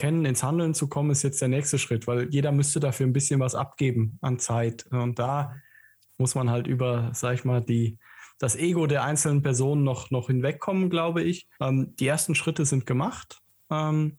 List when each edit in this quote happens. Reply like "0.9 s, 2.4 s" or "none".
11.5 s